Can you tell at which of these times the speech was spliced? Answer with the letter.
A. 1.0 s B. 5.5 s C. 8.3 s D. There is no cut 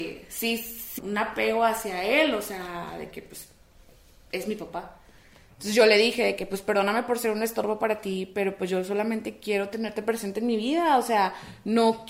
A